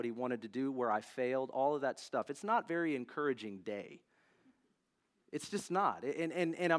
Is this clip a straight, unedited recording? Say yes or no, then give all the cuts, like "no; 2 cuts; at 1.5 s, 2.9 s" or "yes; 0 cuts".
yes; 0 cuts